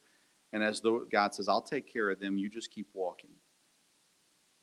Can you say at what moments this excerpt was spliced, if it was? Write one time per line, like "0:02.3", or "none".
0:01.1

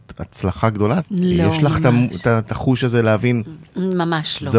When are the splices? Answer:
0:01.0

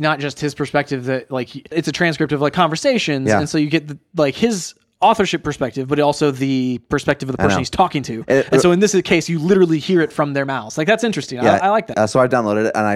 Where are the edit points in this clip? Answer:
0:01.7
0:11.9

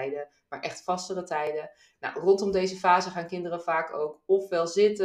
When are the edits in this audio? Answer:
0:01.9

